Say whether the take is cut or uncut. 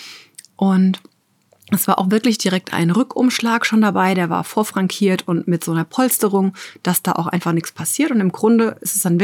uncut